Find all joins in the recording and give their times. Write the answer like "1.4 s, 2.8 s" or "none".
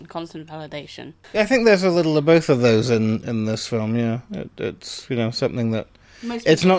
none